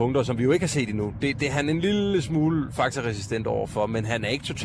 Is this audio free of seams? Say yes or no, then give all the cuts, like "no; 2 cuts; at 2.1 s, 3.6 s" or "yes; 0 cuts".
yes; 0 cuts